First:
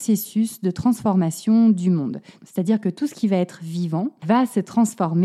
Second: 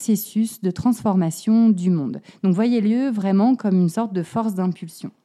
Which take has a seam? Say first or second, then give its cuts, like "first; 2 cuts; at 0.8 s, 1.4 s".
first; 2 cuts; at 2.4 s, 4.2 s